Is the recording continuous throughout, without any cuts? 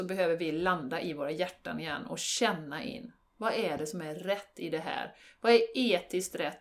yes; 0 cuts

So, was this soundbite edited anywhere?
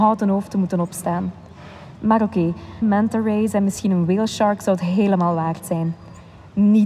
yes; 1 cut; at 2.8 s

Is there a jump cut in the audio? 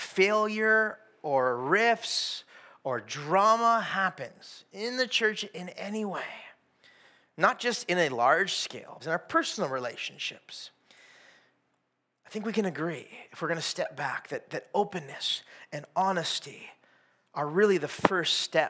yes; 1 cut; at 9.0 s

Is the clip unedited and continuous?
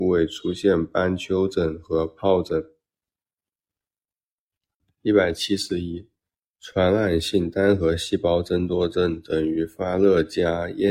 yes; 0 cuts

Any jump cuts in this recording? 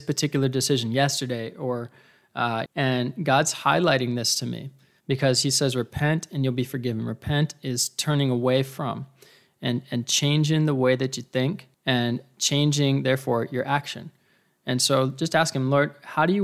yes; 3 cuts; at 2.7 s, 5.0 s, 11.7 s

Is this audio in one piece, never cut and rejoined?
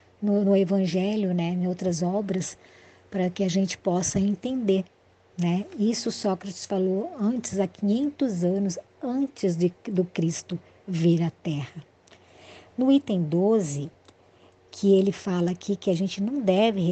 yes; 0 cuts

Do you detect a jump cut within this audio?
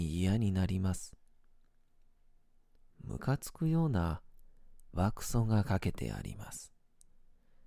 yes; 1 cut; at 4.9 s

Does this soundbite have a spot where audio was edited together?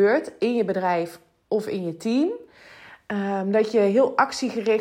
no; 0 cuts

